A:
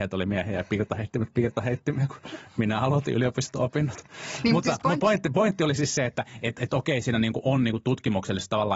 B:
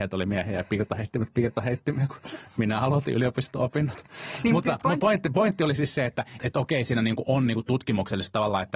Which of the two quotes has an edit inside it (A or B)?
B